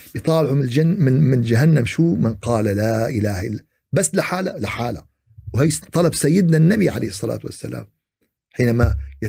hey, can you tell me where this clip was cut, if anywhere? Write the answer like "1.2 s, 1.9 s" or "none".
none